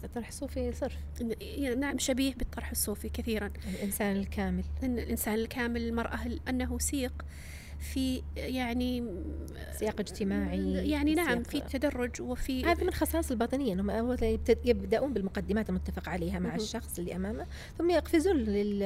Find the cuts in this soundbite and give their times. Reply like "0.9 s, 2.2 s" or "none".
6.4 s, 11.7 s